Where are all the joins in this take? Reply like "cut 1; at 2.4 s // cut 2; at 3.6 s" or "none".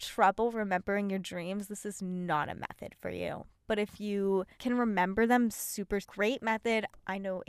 cut 1; at 4.5 s // cut 2; at 6.0 s